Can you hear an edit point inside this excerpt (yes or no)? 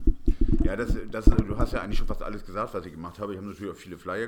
no